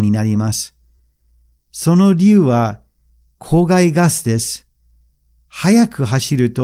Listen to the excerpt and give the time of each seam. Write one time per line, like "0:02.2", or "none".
none